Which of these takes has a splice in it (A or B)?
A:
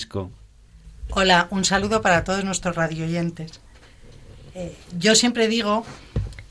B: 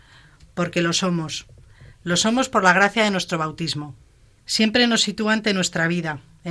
B